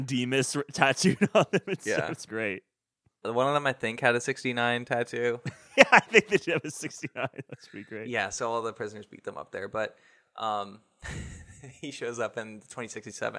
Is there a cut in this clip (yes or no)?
yes